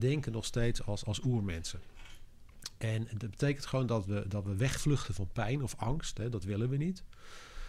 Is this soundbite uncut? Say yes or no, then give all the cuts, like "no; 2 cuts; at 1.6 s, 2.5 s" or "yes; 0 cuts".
yes; 0 cuts